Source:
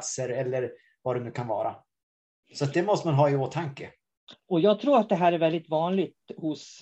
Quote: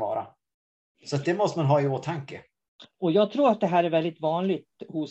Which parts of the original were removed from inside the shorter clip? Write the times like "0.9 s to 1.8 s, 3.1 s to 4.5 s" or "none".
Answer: none